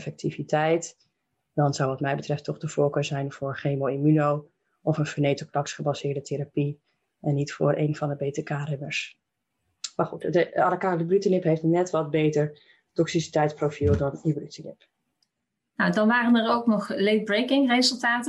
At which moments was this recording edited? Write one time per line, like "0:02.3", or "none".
none